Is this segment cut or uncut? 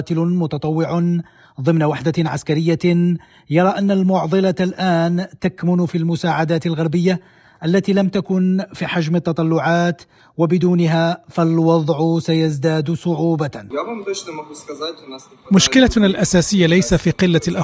uncut